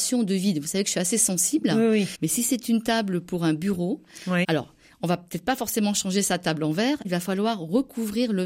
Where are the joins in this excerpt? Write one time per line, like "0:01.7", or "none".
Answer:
0:02.1
0:04.4
0:07.0